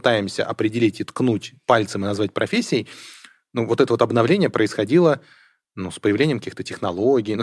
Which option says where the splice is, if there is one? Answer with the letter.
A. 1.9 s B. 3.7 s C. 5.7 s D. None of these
D